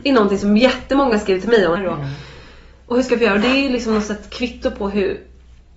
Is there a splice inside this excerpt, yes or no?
yes